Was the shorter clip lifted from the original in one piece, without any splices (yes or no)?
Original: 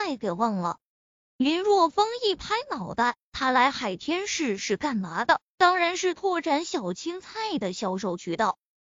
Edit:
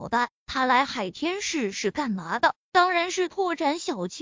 yes